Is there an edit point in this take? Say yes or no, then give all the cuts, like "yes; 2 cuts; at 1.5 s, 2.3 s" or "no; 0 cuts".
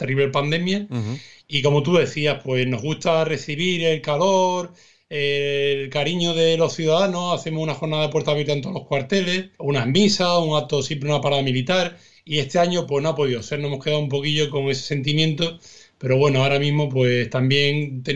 yes; 1 cut; at 9.6 s